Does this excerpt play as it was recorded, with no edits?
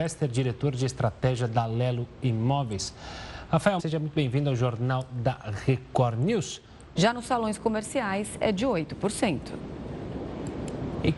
no; 2 cuts; at 3.8 s, 7.0 s

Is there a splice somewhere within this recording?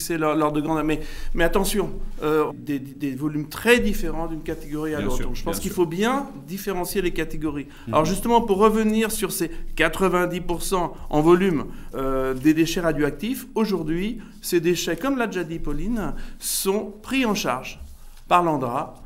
yes; 2 cuts; at 2.5 s, 11.9 s

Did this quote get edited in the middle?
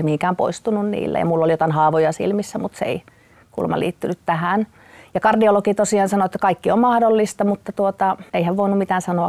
yes; 1 cut; at 8.3 s

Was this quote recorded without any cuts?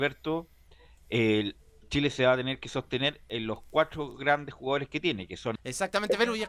no; 1 cut; at 5.6 s

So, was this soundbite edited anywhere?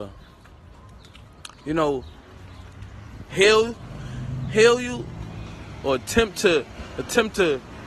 yes; 1 cut; at 3.3 s

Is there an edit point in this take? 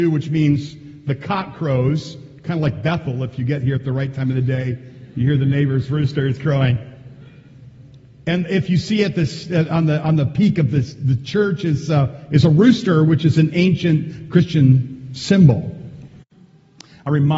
no; 0 cuts

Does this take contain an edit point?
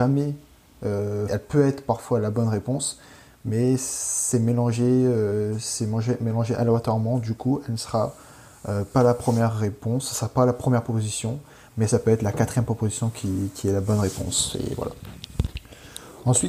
yes; 1 cut; at 1.3 s

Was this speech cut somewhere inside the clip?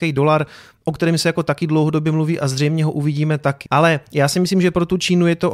yes; 1 cut; at 3.7 s

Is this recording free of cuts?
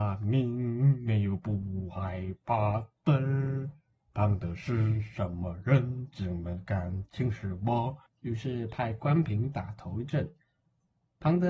yes; 0 cuts

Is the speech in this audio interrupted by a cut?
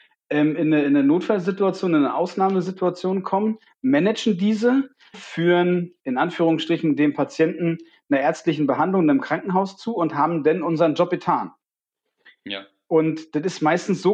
yes; 1 cut; at 5.1 s

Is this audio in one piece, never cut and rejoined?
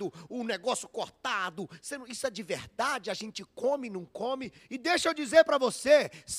no; 1 cut; at 4.6 s

